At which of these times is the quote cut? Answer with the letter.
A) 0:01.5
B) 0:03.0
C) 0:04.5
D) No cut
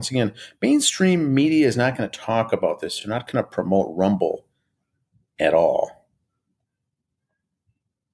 D